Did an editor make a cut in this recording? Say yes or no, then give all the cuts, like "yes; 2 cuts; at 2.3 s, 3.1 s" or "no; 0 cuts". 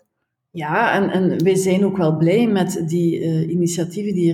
no; 0 cuts